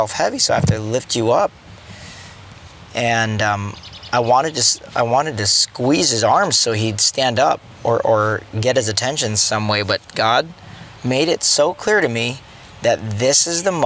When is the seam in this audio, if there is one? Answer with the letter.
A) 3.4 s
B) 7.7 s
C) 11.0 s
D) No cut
C